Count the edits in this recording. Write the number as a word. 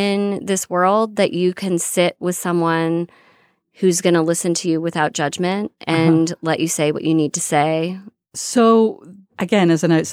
one